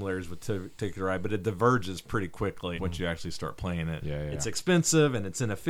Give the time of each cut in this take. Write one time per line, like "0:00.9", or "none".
0:02.8
0:04.0

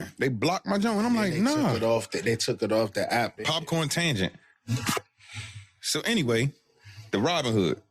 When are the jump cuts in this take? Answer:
0:03.4

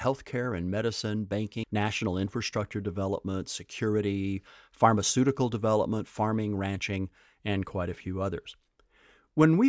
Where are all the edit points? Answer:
0:01.6

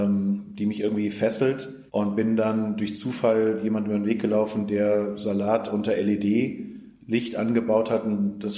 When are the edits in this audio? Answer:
0:01.9

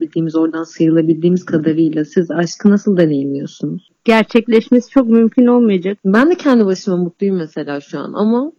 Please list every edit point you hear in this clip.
0:04.0
0:06.0

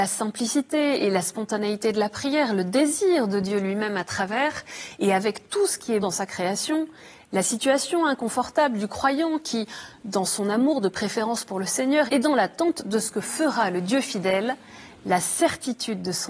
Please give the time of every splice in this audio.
0:06.0
0:12.1

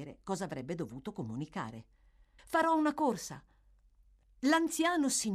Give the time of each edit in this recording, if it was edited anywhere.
0:02.4

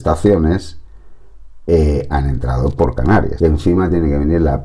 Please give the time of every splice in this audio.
0:03.4

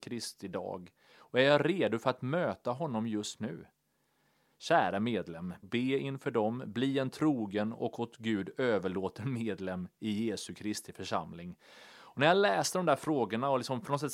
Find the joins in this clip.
0:05.6

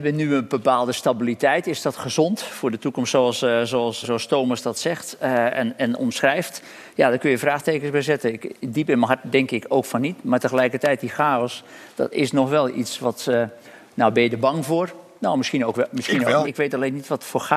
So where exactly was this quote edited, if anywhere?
0:04.0
0:16.4

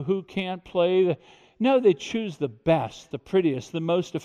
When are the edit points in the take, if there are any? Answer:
0:03.1

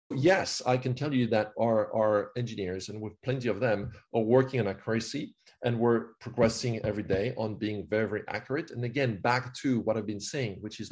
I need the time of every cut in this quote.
none

